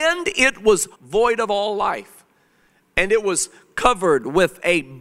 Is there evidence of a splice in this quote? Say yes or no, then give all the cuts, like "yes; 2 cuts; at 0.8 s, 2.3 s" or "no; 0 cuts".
yes; 1 cut; at 0.9 s